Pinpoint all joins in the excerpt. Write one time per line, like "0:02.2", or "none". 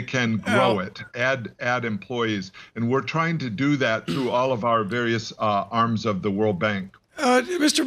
0:01.1